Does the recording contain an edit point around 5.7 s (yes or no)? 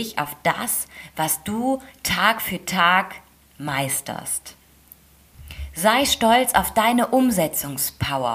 no